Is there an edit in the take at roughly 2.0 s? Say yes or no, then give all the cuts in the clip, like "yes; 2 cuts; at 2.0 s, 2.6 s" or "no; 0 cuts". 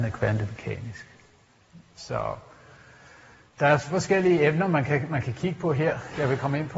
no; 0 cuts